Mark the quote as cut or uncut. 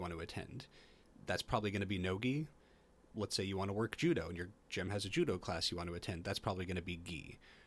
uncut